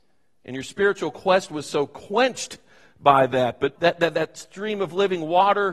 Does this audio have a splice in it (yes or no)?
yes